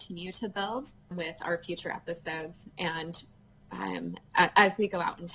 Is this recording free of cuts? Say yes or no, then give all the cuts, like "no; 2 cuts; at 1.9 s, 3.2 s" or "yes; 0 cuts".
no; 1 cut; at 1.1 s